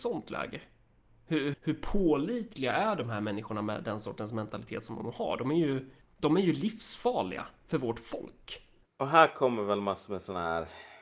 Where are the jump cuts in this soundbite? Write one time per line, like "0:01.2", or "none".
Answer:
0:01.5